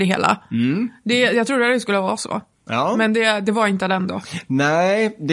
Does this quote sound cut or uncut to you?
uncut